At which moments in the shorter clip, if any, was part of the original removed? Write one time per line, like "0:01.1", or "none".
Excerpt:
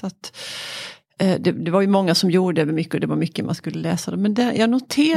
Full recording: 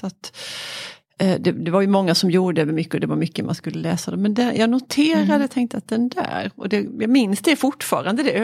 none